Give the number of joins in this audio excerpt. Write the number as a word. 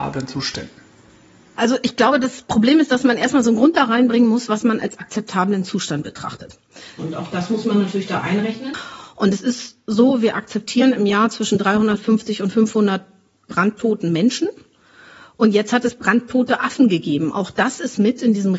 one